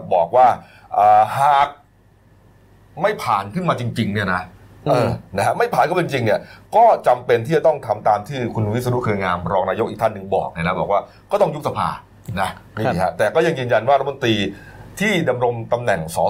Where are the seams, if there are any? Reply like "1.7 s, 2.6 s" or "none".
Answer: none